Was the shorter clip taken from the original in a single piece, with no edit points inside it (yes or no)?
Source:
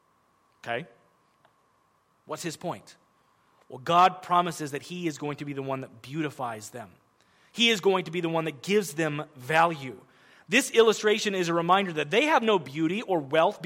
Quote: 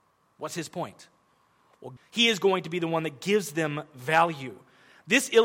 no